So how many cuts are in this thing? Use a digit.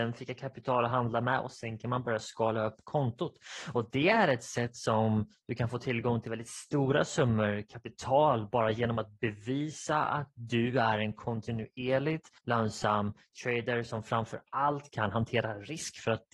1